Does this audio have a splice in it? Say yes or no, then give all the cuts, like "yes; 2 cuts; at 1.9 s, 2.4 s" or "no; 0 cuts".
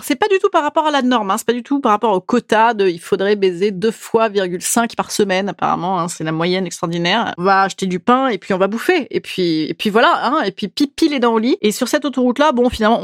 yes; 1 cut; at 7.4 s